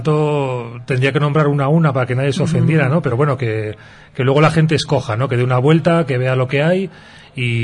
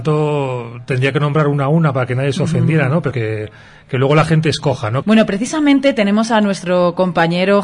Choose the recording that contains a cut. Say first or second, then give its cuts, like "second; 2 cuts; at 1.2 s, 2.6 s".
second; 2 cuts; at 3.1 s, 5.0 s